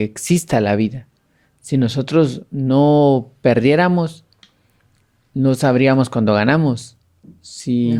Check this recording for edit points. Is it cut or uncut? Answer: uncut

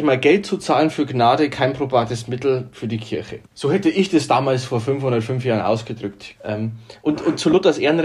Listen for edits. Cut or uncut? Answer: cut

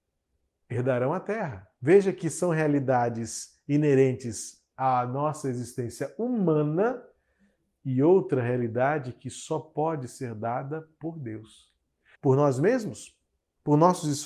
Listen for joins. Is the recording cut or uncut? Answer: cut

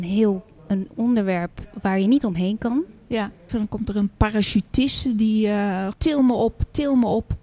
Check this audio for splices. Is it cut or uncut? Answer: cut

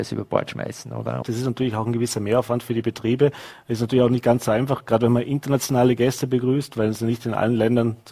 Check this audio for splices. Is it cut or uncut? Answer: cut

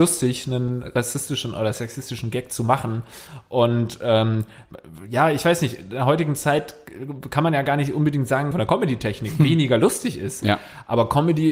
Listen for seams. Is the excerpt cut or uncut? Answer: cut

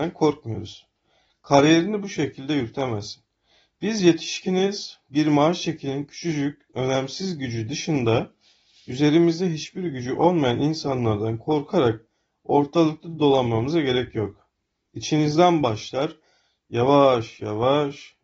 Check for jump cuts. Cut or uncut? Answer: cut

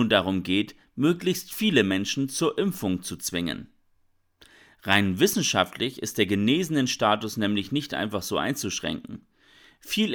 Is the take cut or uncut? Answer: uncut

